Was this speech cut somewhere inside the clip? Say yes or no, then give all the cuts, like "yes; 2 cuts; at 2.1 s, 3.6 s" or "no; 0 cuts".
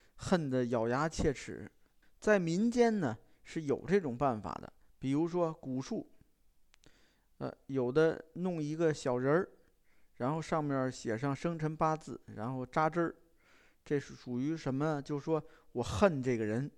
yes; 1 cut; at 2.0 s